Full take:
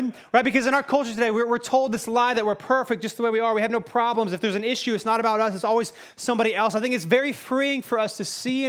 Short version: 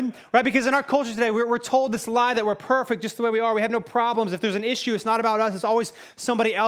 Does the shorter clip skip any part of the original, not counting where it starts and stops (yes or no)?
no